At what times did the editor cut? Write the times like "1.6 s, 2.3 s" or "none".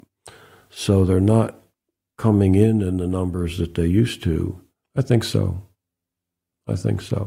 4.8 s